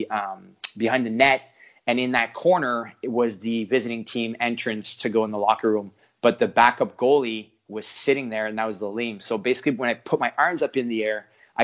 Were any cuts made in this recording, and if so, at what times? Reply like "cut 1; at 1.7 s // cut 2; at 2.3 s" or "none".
none

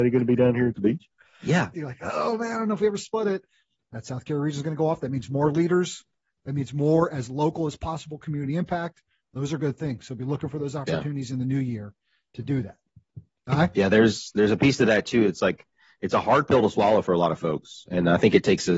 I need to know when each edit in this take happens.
cut 1; at 1.7 s

